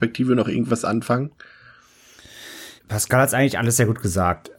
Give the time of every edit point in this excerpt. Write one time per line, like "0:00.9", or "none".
0:02.8